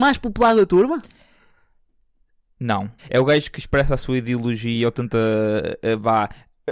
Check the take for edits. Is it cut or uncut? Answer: cut